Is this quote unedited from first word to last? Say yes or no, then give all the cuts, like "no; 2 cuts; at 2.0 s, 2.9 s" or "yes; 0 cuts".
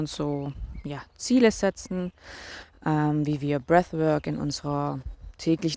yes; 0 cuts